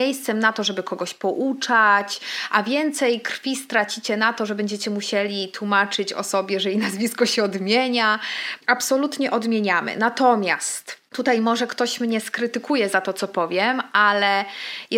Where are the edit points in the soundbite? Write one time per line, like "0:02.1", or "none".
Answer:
0:08.6